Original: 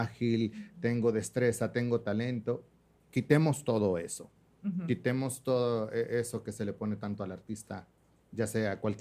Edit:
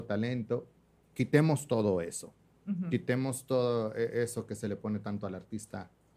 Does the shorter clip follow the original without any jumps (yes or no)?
yes